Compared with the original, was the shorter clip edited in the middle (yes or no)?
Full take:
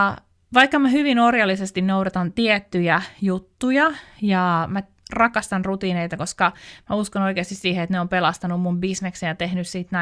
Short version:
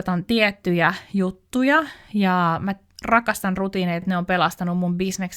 yes